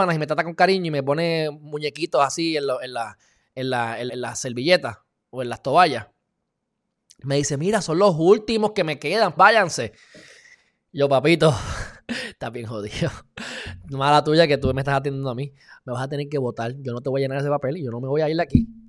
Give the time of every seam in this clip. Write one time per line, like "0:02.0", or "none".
0:04.1
0:09.4